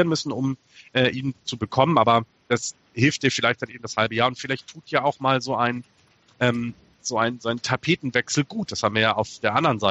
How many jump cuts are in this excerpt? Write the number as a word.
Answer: zero